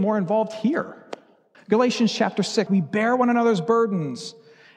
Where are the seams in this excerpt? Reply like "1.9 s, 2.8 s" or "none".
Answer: 1.5 s, 2.7 s

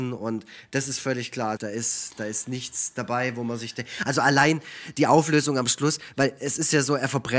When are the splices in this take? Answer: 1.6 s

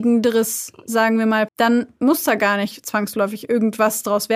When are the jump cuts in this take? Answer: 1.5 s

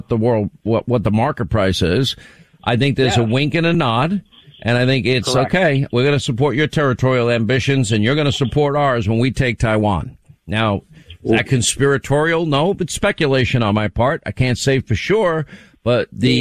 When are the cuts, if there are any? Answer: none

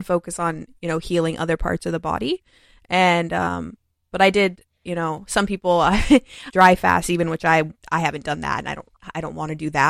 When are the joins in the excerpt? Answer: 6.5 s, 7.8 s

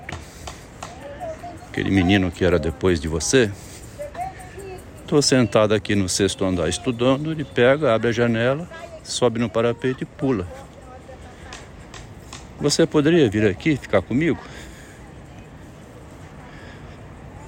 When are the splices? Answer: none

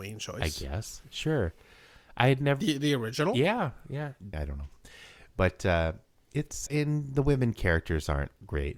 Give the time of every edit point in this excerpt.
4.3 s, 6.7 s

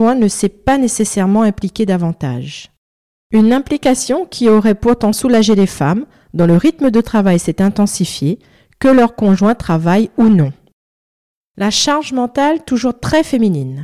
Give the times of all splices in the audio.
none

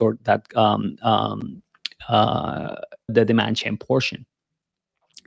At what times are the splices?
3.1 s

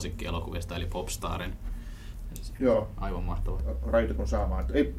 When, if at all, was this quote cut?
2.6 s, 3.6 s

